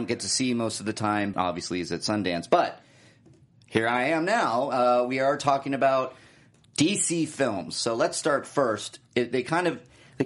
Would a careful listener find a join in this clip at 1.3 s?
yes; 1 cut; at 1.3 s

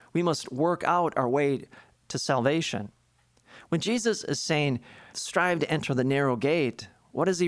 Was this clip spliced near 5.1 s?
yes; 1 cut; at 5.1 s

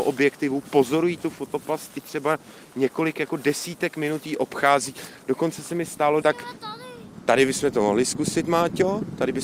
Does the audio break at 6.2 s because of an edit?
yes; 1 cut; at 6.2 s

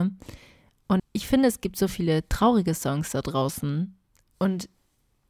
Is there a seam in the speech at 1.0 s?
yes; 1 cut; at 1.0 s

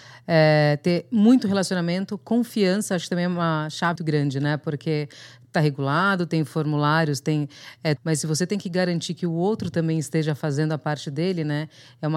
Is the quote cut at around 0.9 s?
no; 2 cuts; at 4.0 s, 8.0 s

